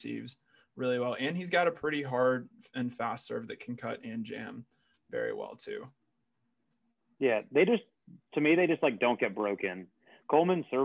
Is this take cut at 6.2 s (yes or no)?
no